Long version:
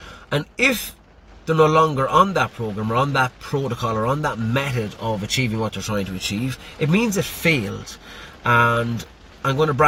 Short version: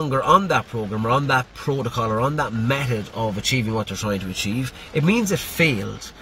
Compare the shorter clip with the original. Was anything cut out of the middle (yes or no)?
no